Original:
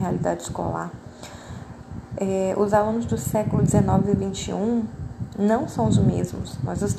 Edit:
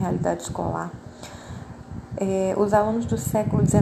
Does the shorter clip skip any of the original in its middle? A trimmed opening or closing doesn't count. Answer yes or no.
no